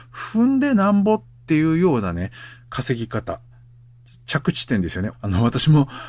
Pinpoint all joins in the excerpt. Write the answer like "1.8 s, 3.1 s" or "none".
5.1 s